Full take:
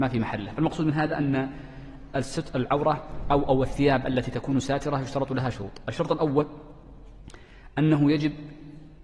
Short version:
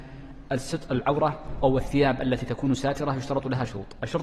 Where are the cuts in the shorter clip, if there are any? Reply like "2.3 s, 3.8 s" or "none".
1.6 s